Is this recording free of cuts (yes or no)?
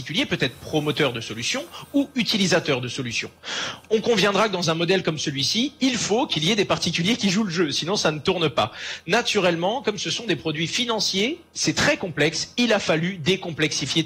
yes